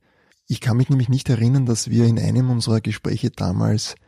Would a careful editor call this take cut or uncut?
uncut